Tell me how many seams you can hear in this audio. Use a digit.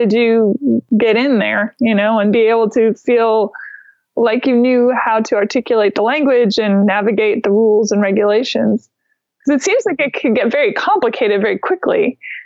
0